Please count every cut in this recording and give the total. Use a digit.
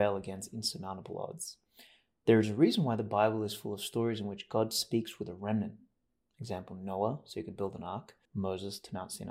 1